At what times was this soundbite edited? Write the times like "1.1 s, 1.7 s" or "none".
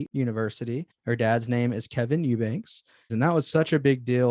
0.9 s, 3.1 s